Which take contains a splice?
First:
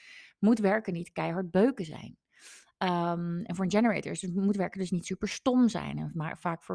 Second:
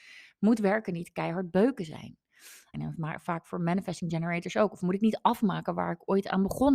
second; 1 cut; at 2.7 s

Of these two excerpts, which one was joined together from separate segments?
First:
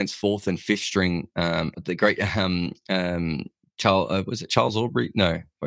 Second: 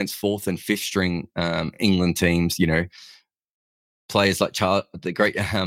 first; 1 cut; at 1.7 s

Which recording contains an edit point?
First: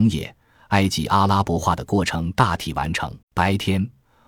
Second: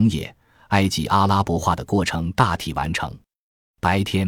first; 1 cut; at 3.2 s

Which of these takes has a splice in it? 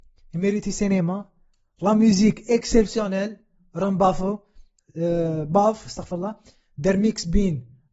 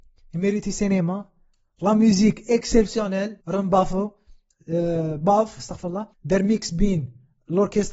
second; 2 cuts; at 3.4 s, 6.1 s

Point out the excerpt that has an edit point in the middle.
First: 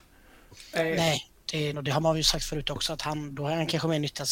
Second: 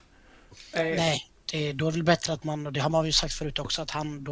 first; 1 cut; at 1.7 s

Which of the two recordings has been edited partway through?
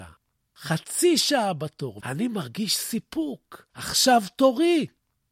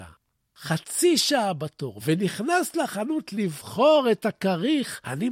first; 1 cut; at 2.0 s

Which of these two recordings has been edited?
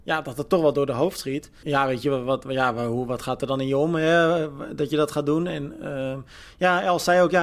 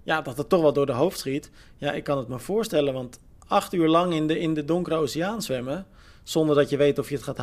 first; 1 cut; at 1.6 s

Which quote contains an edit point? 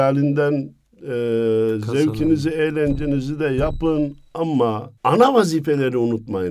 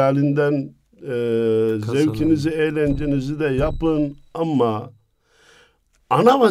first; 1 cut; at 5.0 s

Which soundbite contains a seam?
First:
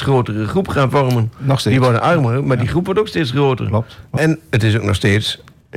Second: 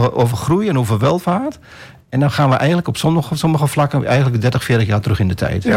first; 1 cut; at 4.2 s

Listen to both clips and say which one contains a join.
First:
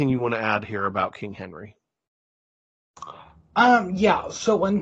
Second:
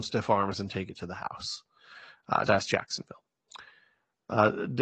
second; 1 cut; at 2.5 s

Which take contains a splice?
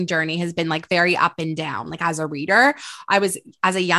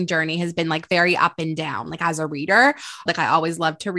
second; 1 cut; at 3.1 s

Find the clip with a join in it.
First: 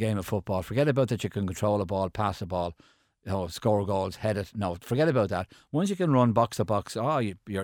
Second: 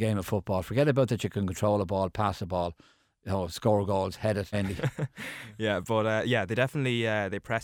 second; 1 cut; at 4.5 s

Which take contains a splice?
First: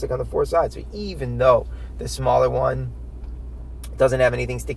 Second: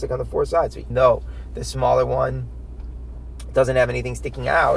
second; 1 cut; at 0.9 s

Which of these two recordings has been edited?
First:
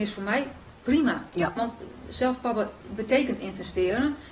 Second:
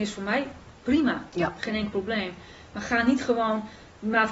first; 1 cut; at 1.6 s

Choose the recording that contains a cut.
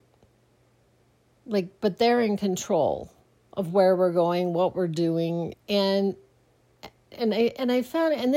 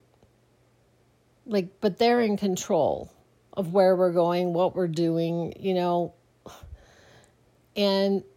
first; 2 cuts; at 5.5 s, 7.1 s

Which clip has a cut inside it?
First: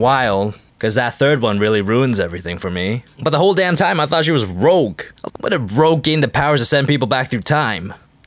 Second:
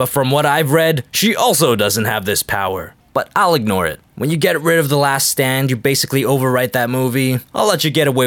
first; 1 cut; at 5.3 s

